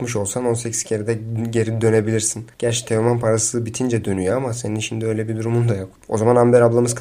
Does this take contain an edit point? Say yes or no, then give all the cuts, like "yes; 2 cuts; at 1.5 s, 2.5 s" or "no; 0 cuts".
no; 0 cuts